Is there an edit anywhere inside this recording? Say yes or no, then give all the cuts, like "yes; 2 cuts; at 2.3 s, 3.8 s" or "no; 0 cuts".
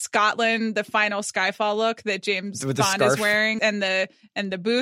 yes; 1 cut; at 3.6 s